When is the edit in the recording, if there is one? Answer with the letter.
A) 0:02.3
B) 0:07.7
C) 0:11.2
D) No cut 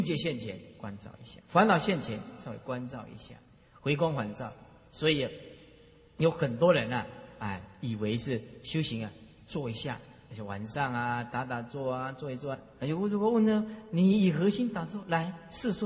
D